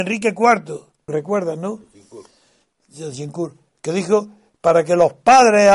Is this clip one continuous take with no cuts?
no; 1 cut; at 1.1 s

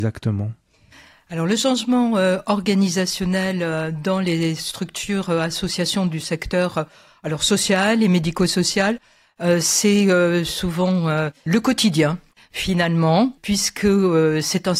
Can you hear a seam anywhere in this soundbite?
yes; 2 cuts; at 11.5 s, 13.4 s

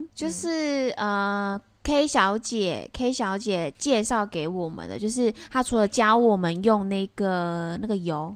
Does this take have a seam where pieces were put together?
no; 0 cuts

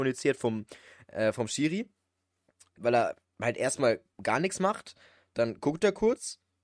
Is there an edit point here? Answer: yes; 1 cut; at 2.8 s

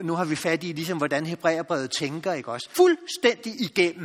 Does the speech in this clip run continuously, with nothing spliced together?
no; 1 cut; at 2.7 s

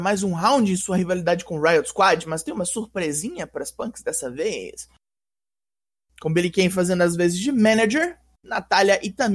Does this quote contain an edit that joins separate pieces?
yes; 1 cut; at 5.2 s

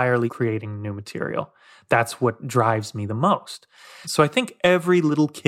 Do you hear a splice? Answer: yes; 1 cut; at 4.0 s

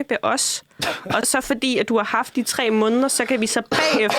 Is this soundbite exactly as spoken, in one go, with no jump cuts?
no; 1 cut; at 1.2 s

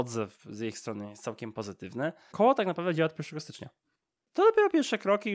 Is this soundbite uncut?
no; 2 cuts; at 2.3 s, 4.2 s

